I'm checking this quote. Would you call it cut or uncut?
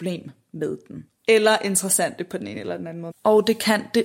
cut